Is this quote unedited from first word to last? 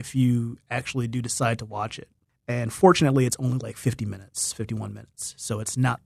yes; 0 cuts

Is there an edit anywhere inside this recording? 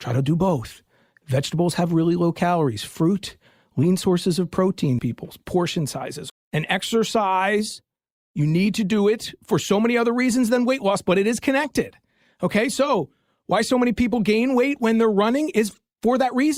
yes; 2 cuts; at 5.0 s, 6.3 s

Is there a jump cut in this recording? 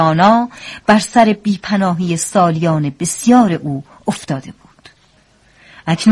no; 0 cuts

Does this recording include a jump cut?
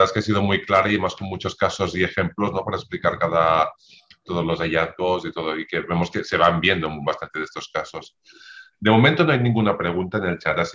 no; 0 cuts

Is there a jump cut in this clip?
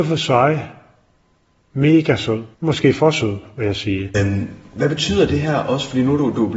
yes; 2 cuts; at 2.5 s, 4.1 s

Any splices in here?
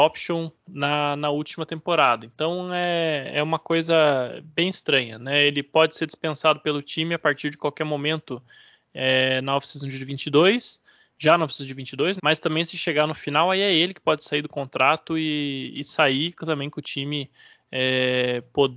yes; 1 cut; at 12.2 s

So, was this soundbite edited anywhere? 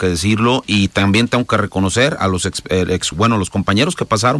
yes; 1 cut; at 3.1 s

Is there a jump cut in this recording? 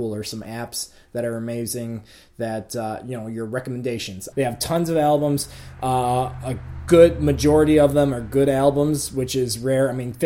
yes; 1 cut; at 4.3 s

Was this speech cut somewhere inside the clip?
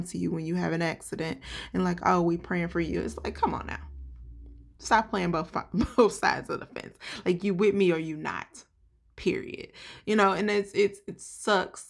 yes; 1 cut; at 4.7 s

